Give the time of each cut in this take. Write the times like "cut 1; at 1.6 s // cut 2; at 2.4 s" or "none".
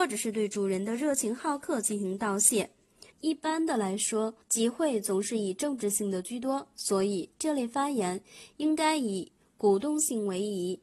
cut 1; at 3.1 s // cut 2; at 4.4 s